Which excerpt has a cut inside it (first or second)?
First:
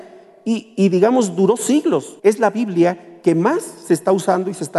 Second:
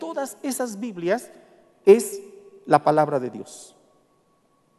first